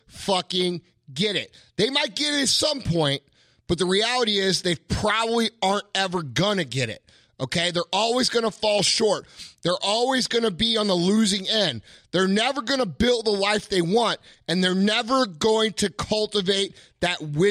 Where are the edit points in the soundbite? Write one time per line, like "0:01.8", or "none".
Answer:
none